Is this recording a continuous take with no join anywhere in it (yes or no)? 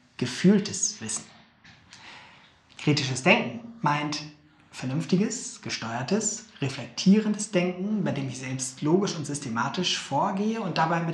yes